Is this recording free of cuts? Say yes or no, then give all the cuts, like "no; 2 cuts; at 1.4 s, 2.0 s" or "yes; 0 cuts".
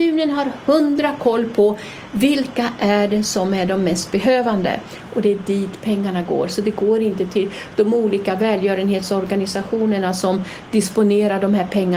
yes; 0 cuts